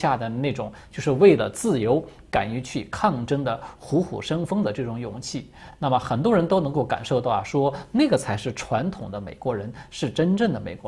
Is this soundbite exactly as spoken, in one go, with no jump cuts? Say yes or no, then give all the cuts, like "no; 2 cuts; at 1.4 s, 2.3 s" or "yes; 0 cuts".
yes; 0 cuts